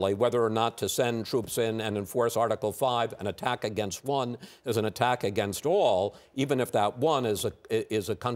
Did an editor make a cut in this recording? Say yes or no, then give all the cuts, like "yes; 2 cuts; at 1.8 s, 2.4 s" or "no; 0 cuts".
no; 0 cuts